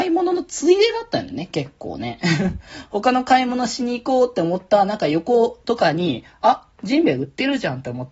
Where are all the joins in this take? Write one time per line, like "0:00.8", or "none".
0:05.6